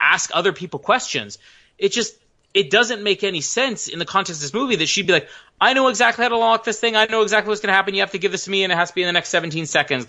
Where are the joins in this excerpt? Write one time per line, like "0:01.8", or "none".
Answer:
none